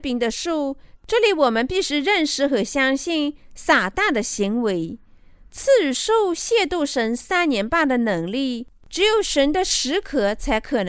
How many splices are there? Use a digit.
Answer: 1